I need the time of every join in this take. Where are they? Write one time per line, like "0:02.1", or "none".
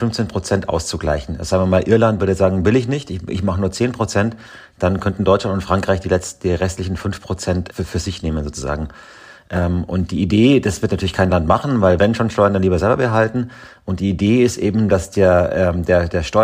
0:07.7